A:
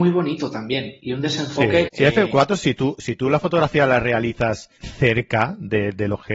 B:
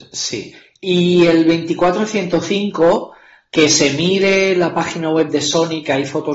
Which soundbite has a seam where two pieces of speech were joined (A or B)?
A